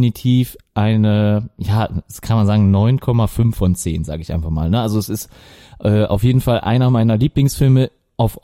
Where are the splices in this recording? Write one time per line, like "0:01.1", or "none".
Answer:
none